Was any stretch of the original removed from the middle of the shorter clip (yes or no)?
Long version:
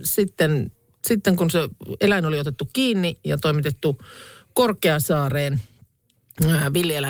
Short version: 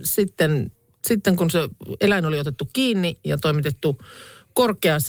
no